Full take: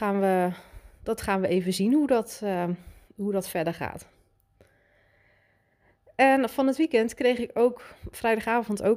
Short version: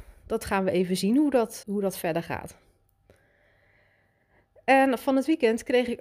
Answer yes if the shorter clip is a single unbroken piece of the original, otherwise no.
no